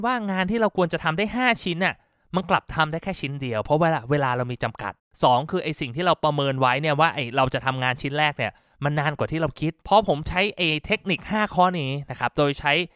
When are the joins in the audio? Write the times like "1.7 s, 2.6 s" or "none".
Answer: 5.0 s, 9.8 s